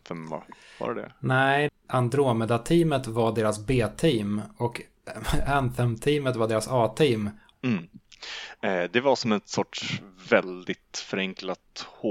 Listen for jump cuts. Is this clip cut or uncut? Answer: cut